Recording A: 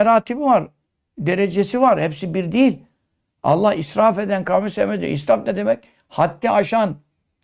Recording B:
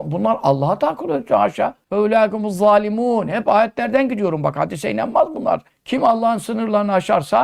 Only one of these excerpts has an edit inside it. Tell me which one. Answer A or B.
B